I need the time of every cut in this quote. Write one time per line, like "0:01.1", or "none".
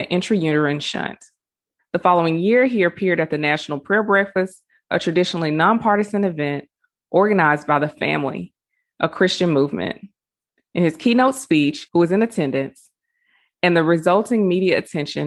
0:01.8
0:11.9